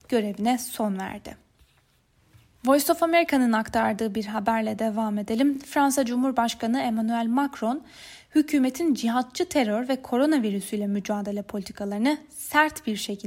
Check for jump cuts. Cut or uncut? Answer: uncut